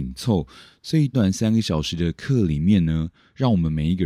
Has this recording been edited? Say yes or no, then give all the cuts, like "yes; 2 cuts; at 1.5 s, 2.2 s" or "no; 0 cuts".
yes; 1 cut; at 1.1 s